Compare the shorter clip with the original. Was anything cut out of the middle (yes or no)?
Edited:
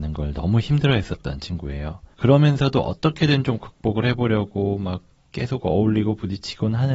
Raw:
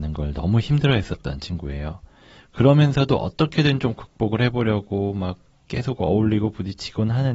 yes